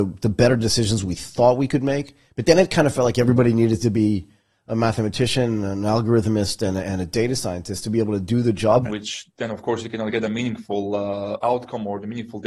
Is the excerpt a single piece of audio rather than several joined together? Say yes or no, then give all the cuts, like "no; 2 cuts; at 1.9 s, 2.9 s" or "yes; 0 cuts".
no; 1 cut; at 8.8 s